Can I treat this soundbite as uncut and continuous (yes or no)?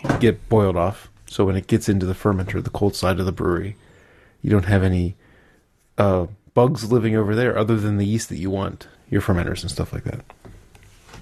no